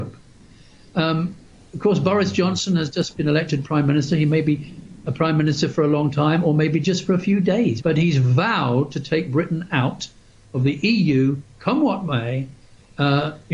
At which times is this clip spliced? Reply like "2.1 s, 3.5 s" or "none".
7.8 s